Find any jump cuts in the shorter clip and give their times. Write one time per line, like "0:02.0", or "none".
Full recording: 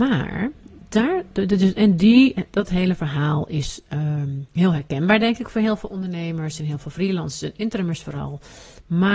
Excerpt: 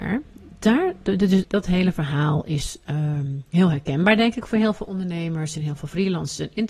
0:01.4

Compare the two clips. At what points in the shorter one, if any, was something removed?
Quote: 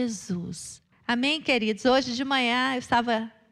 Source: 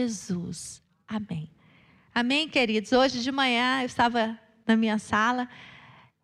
0:00.9

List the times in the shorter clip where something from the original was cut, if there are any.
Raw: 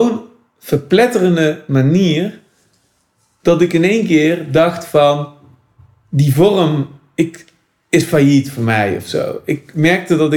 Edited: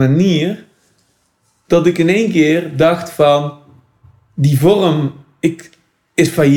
none

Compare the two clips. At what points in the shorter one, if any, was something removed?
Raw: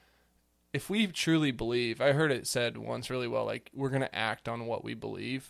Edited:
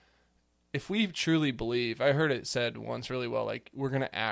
none

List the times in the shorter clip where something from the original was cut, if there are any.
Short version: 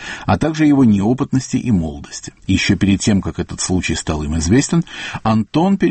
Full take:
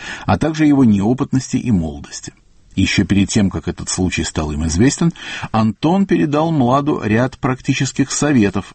0:02.4

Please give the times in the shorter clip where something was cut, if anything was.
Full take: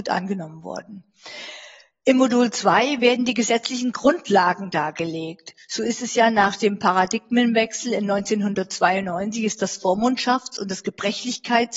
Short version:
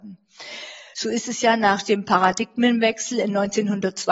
0:00.9

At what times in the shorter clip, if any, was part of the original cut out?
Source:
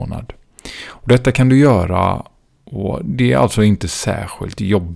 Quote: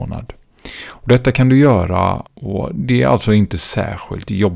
0:02.3

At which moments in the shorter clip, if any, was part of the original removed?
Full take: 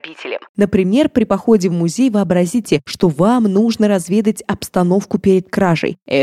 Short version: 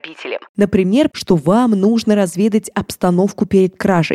0:01.1

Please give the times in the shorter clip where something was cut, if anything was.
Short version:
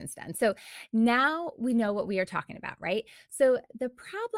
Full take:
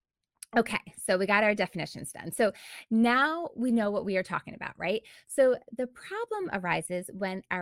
none

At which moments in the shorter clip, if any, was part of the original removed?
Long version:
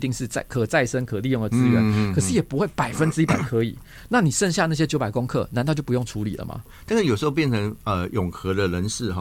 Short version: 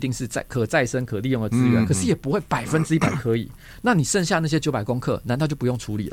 0:01.8

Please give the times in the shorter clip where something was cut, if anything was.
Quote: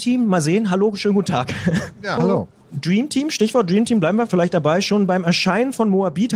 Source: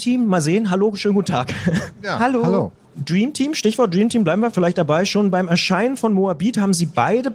0:02.2

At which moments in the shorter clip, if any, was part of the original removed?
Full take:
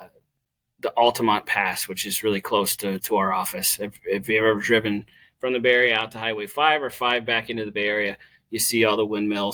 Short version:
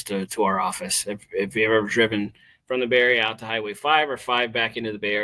none

